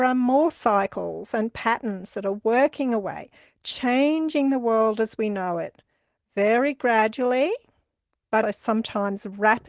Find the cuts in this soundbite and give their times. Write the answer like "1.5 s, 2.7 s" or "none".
8.4 s